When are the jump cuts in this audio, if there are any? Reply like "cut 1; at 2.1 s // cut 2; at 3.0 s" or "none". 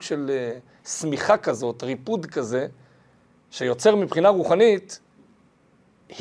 none